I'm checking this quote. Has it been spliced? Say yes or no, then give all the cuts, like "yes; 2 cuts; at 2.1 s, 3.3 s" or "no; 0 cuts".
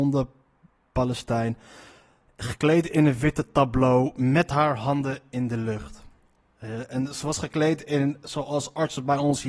no; 0 cuts